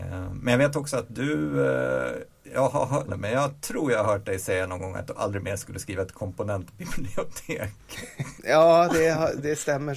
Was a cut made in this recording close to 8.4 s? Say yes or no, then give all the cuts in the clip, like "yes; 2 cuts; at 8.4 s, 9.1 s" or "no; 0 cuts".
yes; 2 cuts; at 3.1 s, 8.4 s